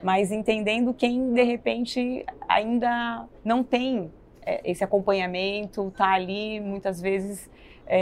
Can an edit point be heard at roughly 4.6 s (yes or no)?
yes